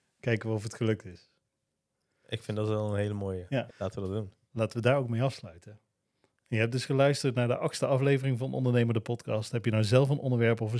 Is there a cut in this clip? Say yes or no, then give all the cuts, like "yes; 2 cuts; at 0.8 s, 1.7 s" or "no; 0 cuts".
yes; 1 cut; at 3.7 s